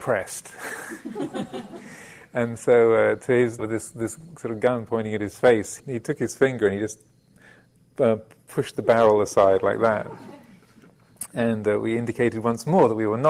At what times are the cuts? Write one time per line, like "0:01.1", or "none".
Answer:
0:03.6
0:05.8